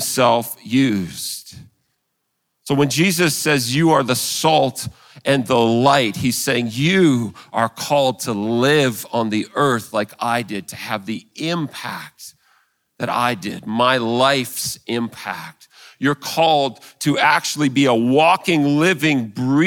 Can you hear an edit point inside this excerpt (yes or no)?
no